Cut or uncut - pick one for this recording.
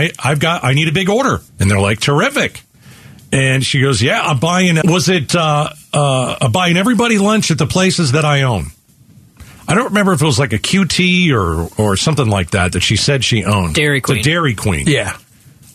cut